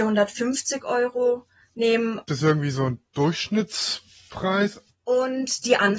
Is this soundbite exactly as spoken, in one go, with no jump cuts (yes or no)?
no